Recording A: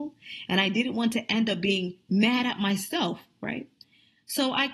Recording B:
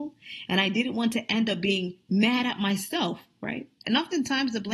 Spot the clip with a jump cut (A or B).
B